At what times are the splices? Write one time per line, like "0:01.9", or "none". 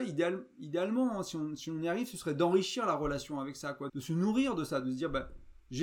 0:03.9